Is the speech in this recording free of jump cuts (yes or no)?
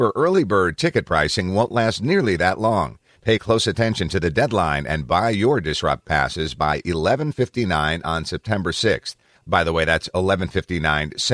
no